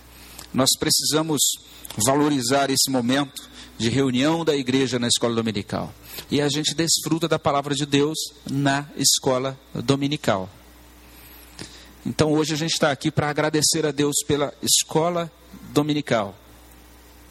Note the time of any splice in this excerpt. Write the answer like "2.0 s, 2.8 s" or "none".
6.3 s

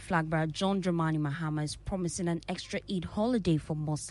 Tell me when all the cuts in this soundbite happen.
none

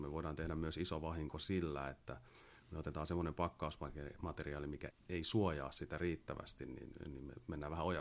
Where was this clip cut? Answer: 4.9 s

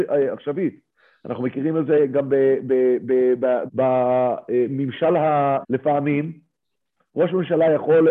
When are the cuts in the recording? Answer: 3.7 s, 5.6 s

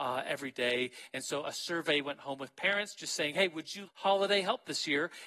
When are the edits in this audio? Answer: 3.9 s

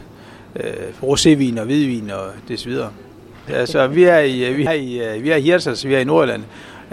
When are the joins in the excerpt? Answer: 3.5 s, 4.7 s

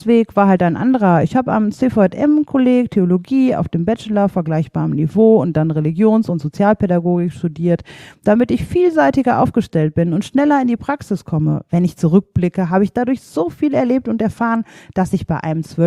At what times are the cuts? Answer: none

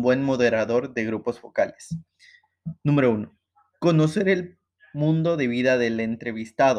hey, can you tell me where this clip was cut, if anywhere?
none

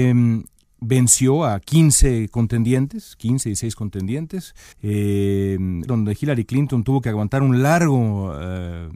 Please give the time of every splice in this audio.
4.7 s, 5.9 s

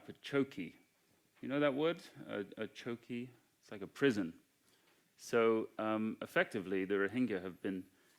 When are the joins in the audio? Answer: none

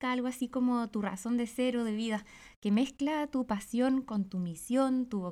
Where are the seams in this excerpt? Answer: none

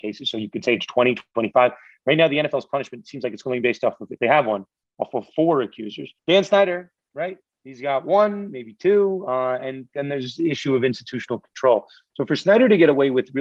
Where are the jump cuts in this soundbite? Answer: 6.2 s

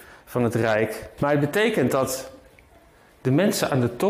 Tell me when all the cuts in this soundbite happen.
1.2 s

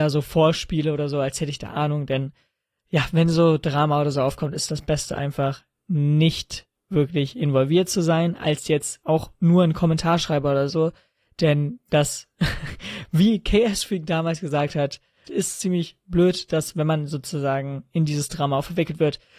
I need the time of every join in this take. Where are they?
15.3 s

